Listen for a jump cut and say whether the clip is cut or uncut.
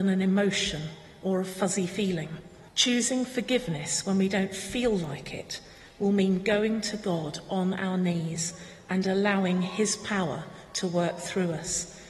cut